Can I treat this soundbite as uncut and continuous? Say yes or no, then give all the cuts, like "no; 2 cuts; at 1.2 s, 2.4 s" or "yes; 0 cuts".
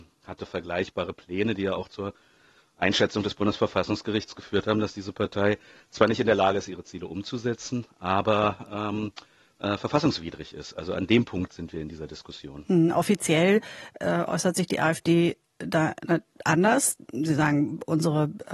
yes; 0 cuts